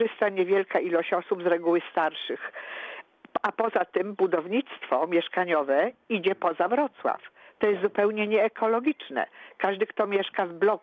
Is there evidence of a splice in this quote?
no; 0 cuts

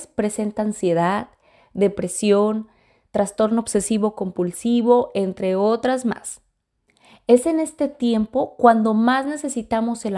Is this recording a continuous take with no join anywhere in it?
yes; 0 cuts

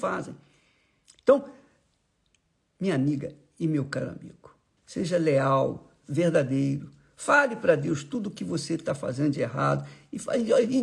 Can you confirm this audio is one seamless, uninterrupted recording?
no; 2 cuts; at 4.8 s, 6.0 s

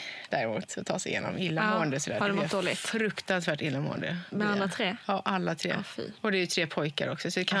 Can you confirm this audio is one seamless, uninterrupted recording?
yes; 0 cuts

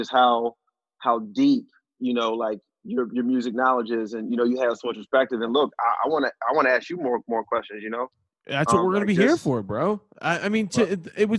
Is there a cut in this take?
no; 0 cuts

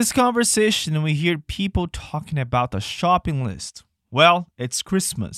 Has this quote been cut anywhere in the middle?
no; 0 cuts

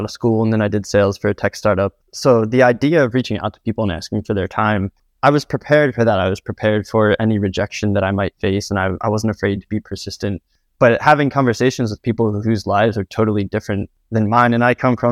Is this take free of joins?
yes; 0 cuts

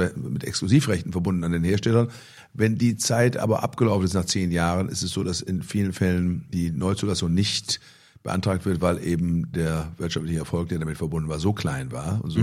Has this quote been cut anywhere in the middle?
no; 0 cuts

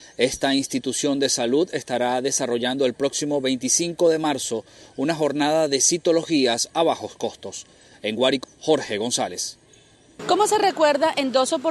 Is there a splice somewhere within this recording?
yes; 2 cuts; at 8.4 s, 10.2 s

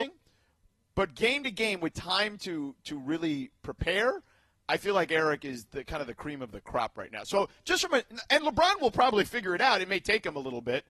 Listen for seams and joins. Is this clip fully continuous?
yes; 0 cuts

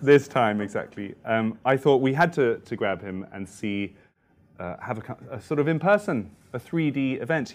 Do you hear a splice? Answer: no; 0 cuts

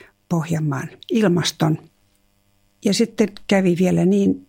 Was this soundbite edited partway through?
yes; 1 cut; at 1.0 s

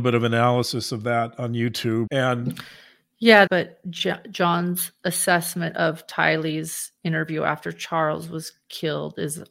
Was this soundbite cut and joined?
yes; 2 cuts; at 2.1 s, 3.5 s

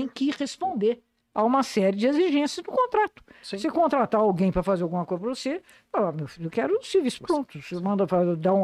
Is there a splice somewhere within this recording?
no; 0 cuts

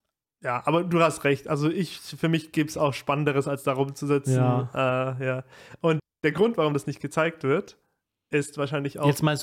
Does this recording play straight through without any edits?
yes; 0 cuts

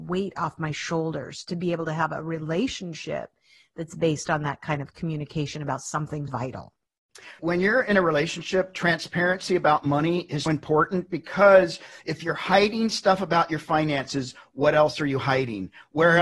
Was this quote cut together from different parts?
yes; 3 cuts; at 6.3 s, 7.4 s, 10.5 s

